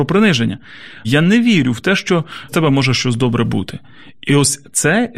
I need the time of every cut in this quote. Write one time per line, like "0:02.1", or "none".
0:01.0
0:02.5